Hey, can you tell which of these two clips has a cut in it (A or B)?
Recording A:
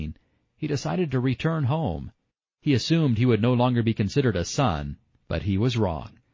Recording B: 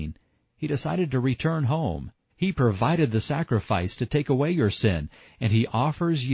B